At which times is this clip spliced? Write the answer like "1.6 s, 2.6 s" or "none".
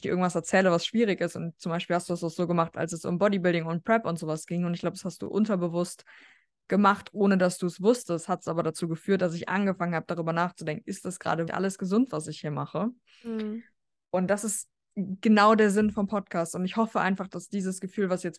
11.5 s